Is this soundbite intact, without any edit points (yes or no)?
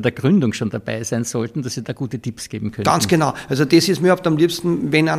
yes